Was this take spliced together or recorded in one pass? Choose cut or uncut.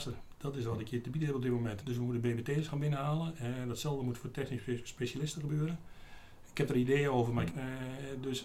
cut